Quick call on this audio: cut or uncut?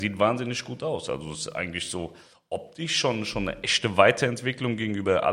uncut